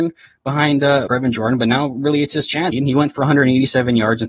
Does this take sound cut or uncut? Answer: cut